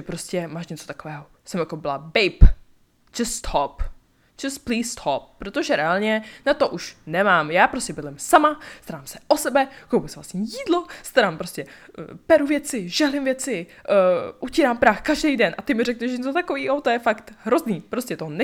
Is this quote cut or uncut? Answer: uncut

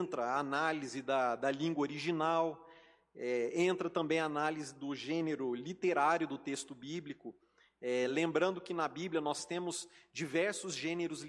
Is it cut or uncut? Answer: uncut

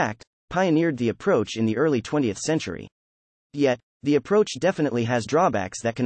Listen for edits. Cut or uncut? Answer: uncut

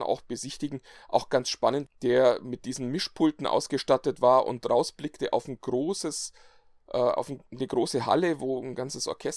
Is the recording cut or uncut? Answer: cut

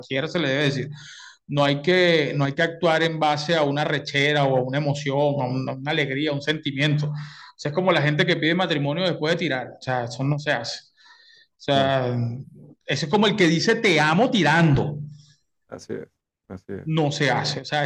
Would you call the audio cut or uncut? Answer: uncut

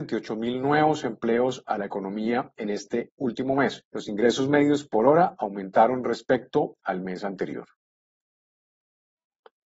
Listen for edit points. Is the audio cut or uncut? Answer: cut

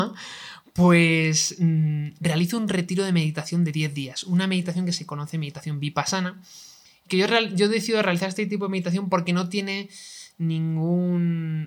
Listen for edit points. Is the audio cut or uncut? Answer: uncut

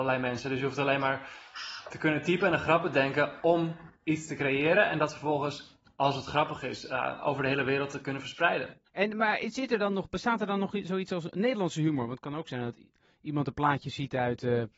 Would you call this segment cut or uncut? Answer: uncut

